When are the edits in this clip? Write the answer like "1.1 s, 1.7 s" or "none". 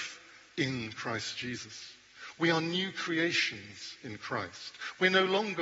none